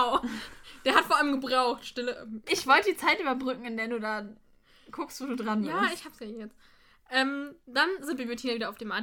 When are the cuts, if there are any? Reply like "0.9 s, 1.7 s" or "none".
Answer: 2.5 s